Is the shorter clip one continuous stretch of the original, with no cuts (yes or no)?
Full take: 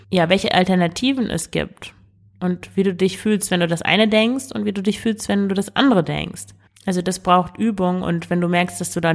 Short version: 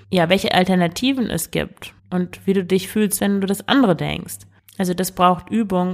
no